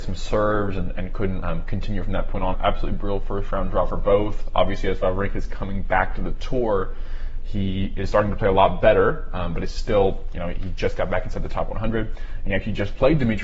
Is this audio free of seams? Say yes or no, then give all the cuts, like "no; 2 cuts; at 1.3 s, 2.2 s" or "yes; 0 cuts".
no; 2 cuts; at 1.4 s, 2.5 s